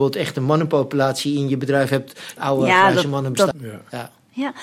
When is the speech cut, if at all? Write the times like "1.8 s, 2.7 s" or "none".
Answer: 2.4 s, 3.5 s